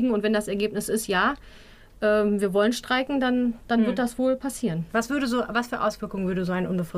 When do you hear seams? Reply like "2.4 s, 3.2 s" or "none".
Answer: none